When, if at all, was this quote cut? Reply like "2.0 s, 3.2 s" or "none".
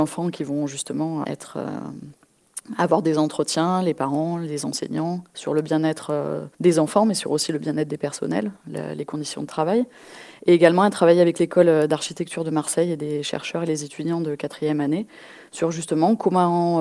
1.2 s, 6.5 s